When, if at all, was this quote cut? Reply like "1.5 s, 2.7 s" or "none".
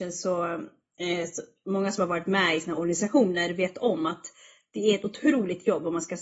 none